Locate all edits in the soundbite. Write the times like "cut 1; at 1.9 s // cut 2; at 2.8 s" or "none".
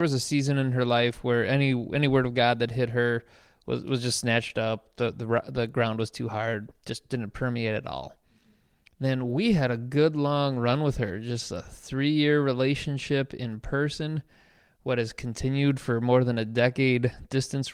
none